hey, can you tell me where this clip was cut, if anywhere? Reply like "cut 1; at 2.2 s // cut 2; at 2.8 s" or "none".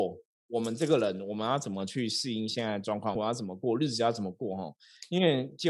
cut 1; at 3.2 s